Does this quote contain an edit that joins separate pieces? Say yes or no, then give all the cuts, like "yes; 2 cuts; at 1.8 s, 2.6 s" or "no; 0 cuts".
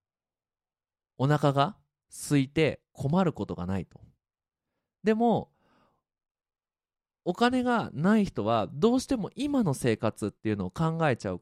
no; 0 cuts